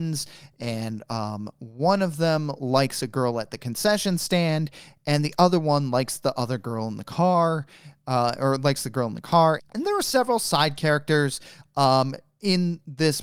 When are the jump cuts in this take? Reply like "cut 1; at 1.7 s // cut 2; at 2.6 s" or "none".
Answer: cut 1; at 9.6 s